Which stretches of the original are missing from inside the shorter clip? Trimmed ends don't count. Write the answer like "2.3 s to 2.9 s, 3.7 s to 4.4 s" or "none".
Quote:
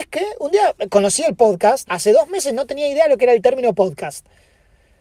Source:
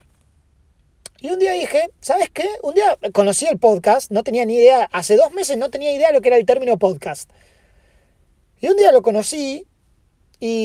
4.1 s to 4.9 s